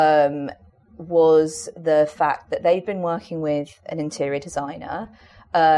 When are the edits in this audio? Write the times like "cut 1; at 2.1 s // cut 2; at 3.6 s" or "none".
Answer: none